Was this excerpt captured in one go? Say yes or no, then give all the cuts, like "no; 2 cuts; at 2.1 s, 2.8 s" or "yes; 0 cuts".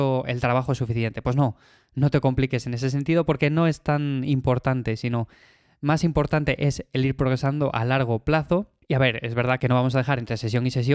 yes; 0 cuts